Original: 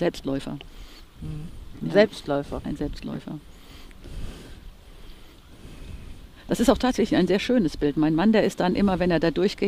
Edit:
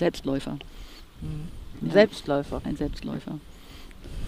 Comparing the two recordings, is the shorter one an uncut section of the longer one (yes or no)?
yes